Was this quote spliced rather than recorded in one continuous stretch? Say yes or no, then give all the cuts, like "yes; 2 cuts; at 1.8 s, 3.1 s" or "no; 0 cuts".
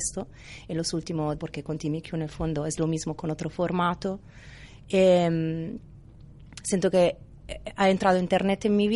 yes; 1 cut; at 1.4 s